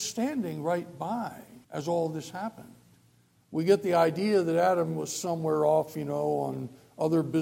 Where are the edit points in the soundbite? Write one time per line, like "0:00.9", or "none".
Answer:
0:01.6